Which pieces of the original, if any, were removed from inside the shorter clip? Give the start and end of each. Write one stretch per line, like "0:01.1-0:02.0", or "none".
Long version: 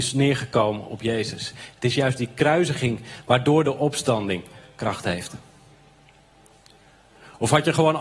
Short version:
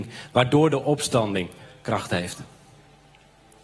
none